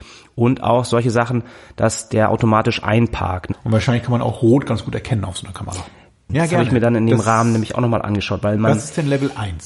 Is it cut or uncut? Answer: cut